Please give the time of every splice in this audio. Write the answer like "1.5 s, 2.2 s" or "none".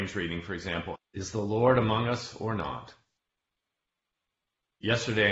1.0 s